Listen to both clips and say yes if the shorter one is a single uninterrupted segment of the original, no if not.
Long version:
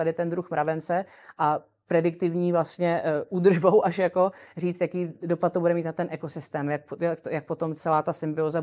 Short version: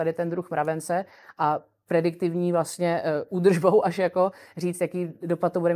yes